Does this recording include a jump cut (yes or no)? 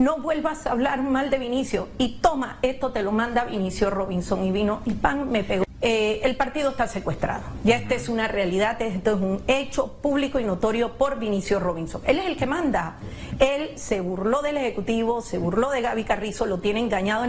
no